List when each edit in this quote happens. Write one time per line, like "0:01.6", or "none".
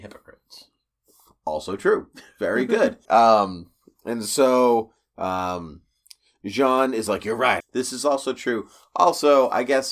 0:03.1
0:07.6

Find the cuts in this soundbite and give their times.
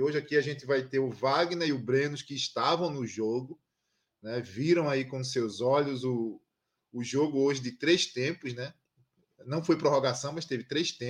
none

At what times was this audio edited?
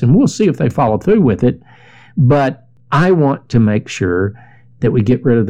none

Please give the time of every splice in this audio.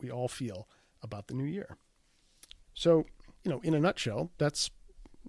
0:03.4

